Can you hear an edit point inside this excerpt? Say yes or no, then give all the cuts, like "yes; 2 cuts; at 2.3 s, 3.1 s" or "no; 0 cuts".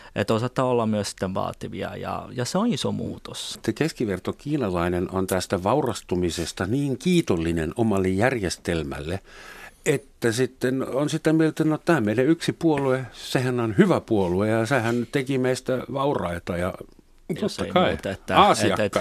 yes; 2 cuts; at 3.5 s, 17.4 s